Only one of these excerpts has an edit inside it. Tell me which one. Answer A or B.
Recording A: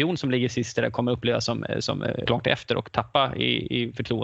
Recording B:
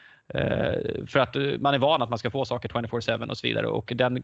A